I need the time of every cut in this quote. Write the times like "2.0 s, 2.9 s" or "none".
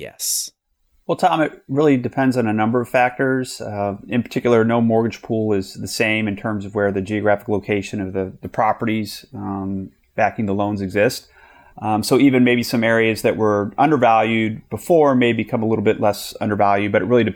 11.7 s